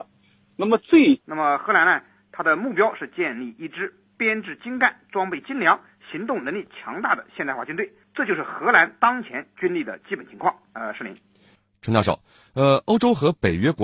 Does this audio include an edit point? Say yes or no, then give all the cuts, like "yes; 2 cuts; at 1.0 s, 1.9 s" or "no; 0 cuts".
yes; 1 cut; at 1.2 s